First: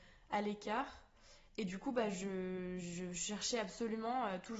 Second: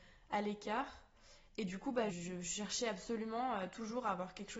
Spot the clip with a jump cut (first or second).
second